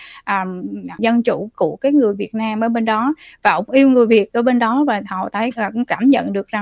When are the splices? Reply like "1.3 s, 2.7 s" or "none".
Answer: 1.0 s